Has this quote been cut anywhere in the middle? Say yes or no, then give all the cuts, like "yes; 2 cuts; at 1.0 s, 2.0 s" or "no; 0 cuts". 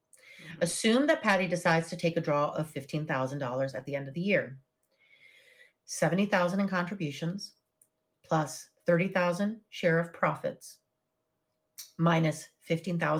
yes; 1 cut; at 5.7 s